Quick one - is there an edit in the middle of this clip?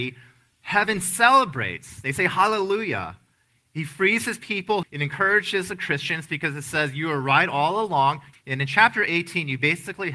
yes; 2 cuts; at 4.8 s, 8.3 s

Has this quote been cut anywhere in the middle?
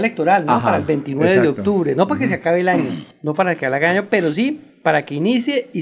no; 0 cuts

